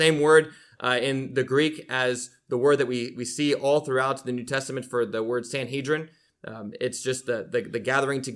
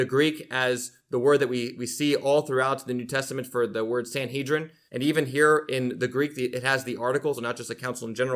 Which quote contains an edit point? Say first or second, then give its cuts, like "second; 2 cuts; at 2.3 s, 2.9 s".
second; 2 cuts; at 4.9 s, 7.4 s